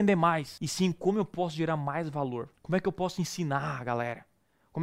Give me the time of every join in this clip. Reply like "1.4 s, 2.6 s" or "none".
none